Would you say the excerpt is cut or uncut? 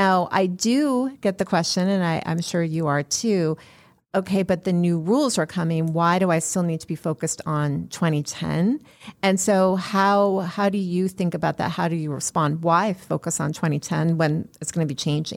uncut